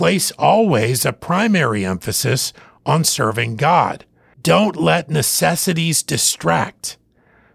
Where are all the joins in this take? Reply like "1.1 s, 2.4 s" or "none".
4.3 s